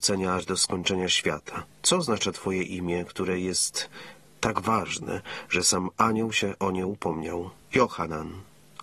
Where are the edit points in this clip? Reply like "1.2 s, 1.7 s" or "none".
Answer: 1.7 s

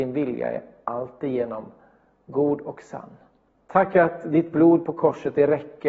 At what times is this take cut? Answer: 3.6 s

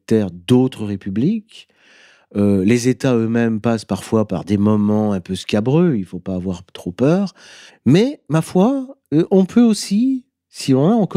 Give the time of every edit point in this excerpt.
7.7 s

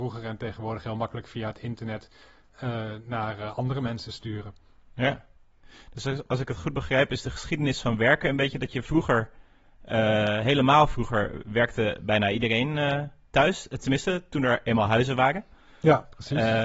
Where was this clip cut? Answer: none

